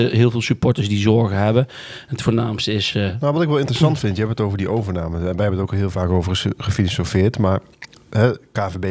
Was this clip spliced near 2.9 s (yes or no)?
no